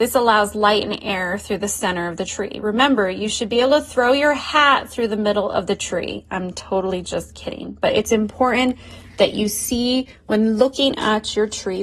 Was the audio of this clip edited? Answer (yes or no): no